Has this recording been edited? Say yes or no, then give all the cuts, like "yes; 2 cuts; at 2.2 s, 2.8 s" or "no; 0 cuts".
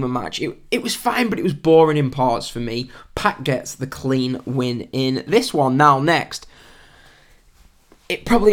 no; 0 cuts